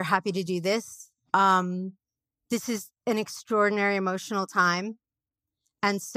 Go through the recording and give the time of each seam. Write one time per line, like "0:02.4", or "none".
0:01.3

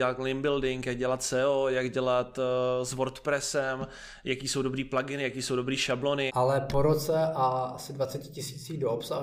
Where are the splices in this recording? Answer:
0:06.3

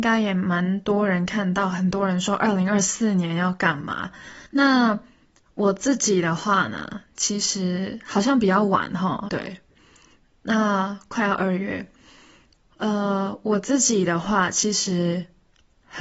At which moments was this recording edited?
0:04.5
0:09.3

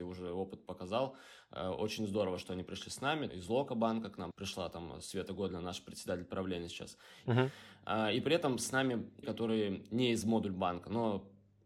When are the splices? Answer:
0:03.3
0:07.3
0:09.2

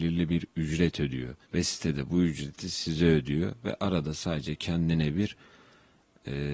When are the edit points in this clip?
0:01.4

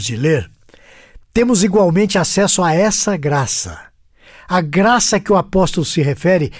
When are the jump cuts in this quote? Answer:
none

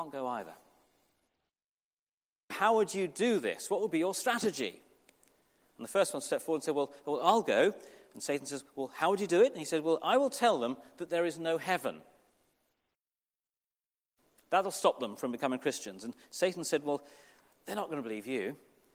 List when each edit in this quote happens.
0:02.5

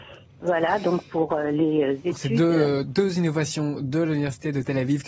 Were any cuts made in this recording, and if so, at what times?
0:02.8

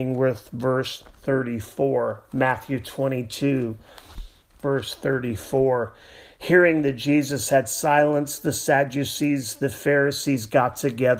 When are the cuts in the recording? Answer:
none

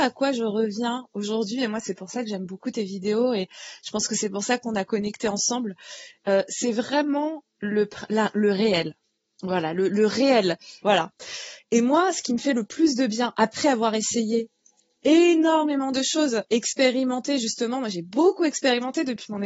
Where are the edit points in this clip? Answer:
0:10.8

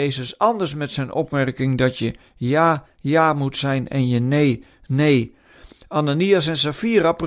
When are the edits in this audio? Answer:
none

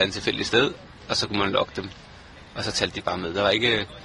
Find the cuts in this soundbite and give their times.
none

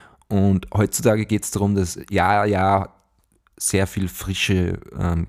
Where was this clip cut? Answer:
none

